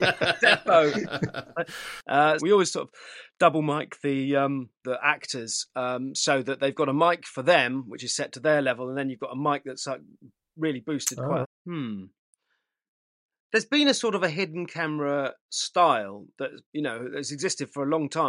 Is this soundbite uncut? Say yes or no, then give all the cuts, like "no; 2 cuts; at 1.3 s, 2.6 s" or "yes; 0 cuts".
no; 3 cuts; at 2.4 s, 11.4 s, 16.6 s